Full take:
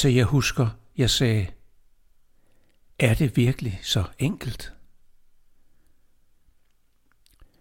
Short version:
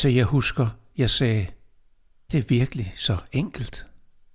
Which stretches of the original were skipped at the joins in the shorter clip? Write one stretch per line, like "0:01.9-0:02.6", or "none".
0:02.3-0:03.2